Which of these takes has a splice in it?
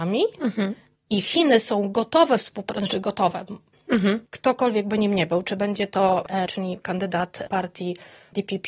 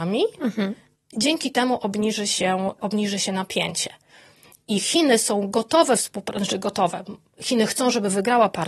first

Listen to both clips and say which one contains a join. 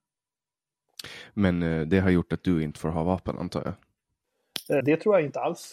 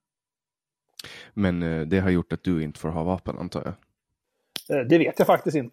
first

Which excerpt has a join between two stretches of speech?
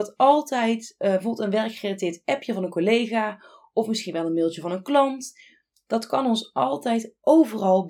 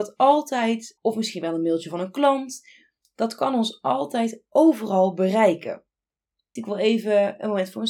second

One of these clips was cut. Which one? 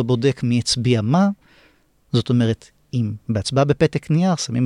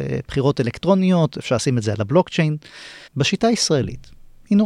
second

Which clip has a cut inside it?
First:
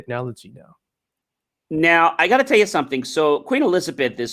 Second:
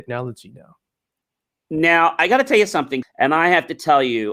second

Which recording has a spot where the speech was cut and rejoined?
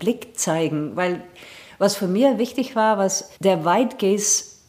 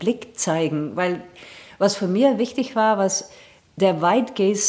first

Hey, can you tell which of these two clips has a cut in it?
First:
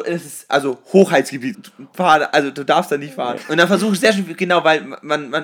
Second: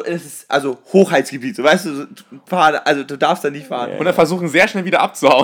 first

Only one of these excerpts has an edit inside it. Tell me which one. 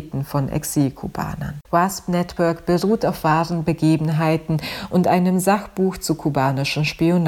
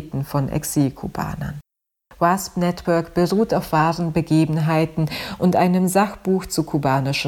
first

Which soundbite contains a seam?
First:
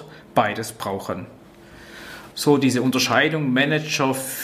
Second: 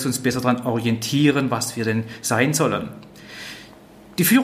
first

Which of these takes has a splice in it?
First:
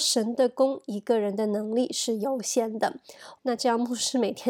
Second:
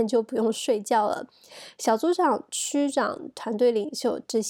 first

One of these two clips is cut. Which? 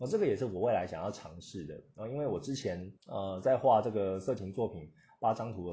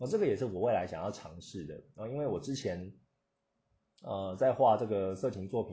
first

